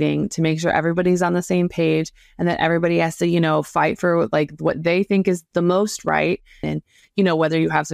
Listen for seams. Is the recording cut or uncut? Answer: cut